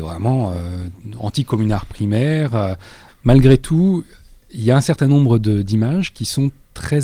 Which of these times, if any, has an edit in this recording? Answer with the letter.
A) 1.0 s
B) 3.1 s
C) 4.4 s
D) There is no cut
B